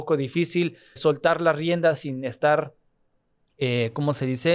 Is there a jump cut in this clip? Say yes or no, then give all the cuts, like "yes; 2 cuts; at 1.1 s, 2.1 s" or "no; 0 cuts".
yes; 1 cut; at 1.0 s